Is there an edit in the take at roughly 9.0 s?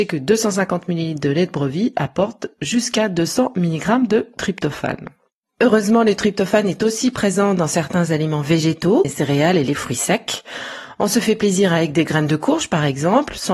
yes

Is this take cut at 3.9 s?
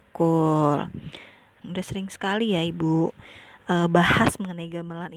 no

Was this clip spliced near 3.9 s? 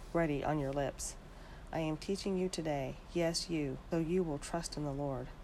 yes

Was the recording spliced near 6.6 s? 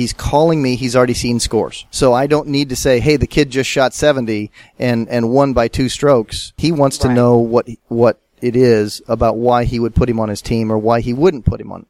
yes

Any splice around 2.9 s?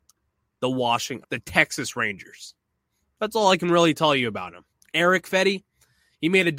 no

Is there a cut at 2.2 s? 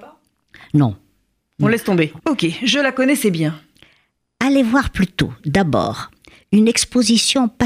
yes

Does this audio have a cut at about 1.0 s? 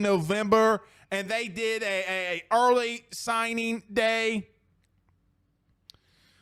no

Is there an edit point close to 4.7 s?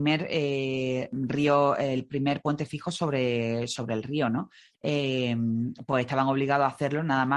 yes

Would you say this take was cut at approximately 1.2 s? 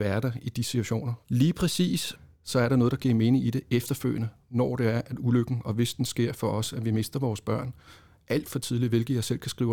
yes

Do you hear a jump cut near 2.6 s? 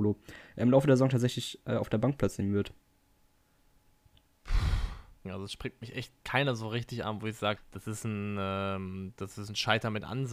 no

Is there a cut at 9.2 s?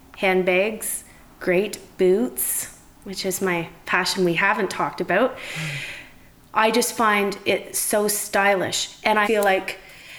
yes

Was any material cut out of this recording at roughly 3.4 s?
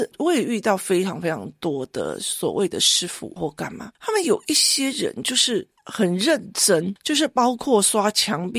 yes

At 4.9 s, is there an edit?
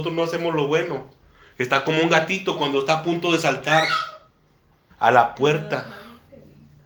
yes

